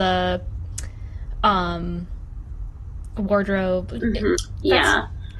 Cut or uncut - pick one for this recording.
cut